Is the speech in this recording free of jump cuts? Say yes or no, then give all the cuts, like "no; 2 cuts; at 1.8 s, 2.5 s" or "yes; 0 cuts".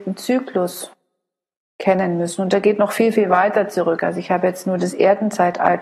yes; 0 cuts